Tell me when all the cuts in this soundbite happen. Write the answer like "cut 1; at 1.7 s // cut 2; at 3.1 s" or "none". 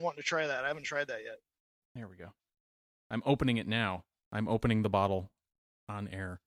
cut 1; at 1.8 s